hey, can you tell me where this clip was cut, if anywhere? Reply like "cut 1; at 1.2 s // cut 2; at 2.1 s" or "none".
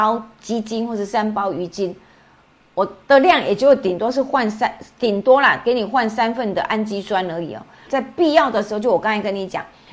cut 1; at 7.9 s